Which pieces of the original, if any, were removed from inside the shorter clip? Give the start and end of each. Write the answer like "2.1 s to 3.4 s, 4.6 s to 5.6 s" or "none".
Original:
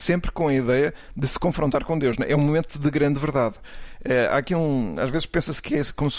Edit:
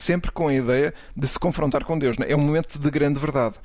none